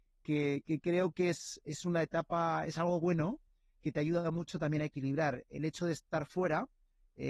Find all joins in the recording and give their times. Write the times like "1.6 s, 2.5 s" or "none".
none